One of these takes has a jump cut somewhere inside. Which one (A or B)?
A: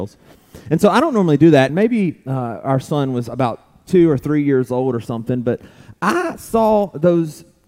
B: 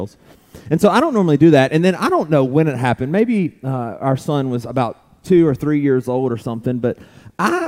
A